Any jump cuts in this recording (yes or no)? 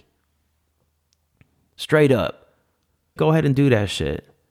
yes